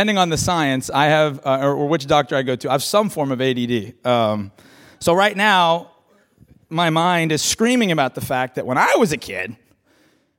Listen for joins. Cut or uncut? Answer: uncut